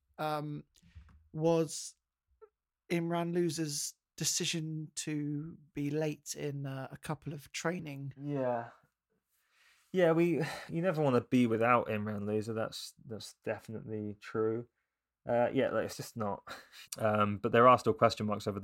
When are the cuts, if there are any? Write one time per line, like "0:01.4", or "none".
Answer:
0:10.7
0:16.8